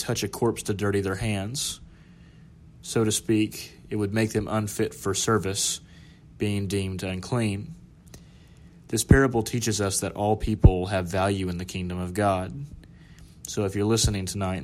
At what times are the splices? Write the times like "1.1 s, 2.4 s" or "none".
none